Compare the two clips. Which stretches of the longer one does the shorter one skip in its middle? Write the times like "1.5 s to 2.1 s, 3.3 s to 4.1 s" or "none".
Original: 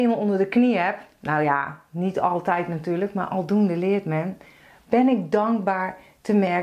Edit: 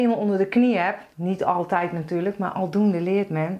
1.1 s to 1.9 s

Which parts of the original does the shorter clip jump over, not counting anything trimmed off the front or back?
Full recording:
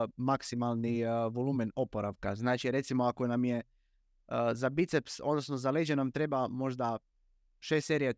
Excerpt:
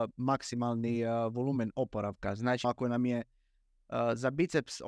2.6 s to 3.0 s

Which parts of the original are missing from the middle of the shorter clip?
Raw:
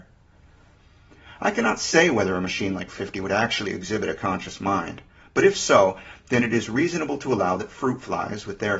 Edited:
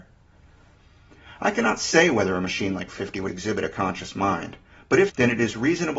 3.3 s to 3.7 s, 5.5 s to 6.2 s

